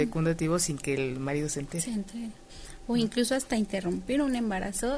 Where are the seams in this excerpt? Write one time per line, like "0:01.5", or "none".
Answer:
none